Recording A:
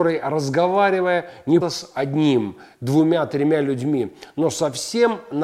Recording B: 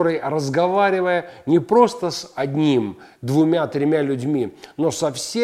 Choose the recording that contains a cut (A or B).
A